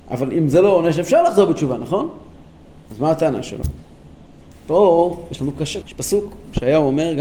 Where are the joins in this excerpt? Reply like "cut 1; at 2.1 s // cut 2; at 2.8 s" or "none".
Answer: cut 1; at 4.5 s // cut 2; at 5.8 s